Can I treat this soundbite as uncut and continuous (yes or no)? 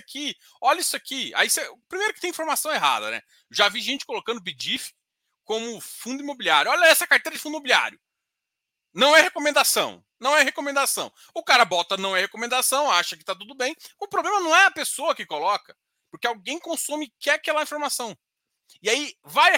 no